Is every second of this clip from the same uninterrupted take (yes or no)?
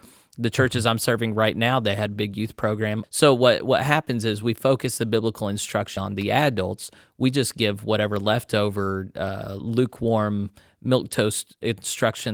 no